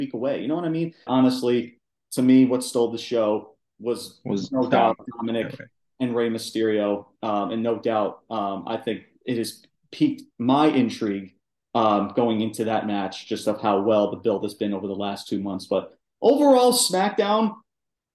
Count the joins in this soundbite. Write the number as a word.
one